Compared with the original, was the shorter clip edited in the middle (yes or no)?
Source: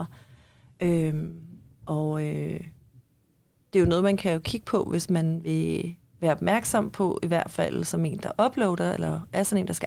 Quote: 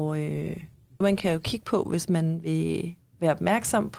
yes